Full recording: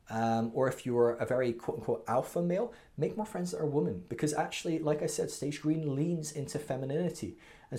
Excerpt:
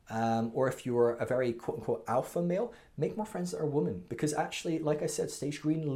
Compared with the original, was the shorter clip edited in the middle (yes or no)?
no